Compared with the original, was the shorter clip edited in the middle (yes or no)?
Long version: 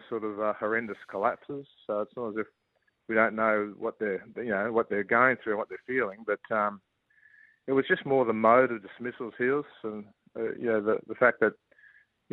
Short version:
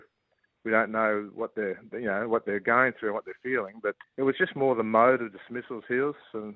yes